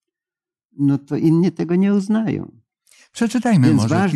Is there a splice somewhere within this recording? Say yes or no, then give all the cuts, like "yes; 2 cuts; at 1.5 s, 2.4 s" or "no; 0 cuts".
no; 0 cuts